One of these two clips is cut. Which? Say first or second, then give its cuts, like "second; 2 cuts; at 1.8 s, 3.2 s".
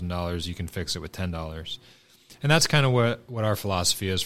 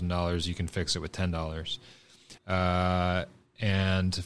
second; 1 cut; at 2.4 s